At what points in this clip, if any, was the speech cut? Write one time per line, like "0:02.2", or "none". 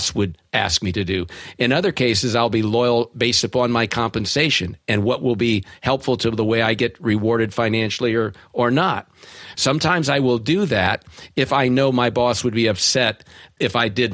0:09.5